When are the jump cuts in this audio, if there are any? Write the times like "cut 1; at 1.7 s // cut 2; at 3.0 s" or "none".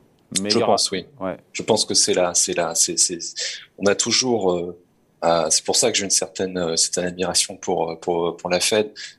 none